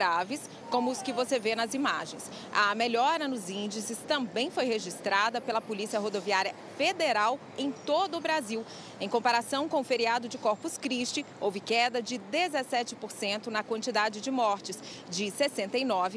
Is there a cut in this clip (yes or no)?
no